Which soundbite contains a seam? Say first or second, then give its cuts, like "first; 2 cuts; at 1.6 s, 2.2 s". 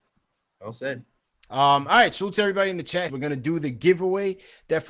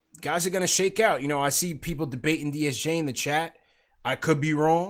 first; 2 cuts; at 1.5 s, 3.1 s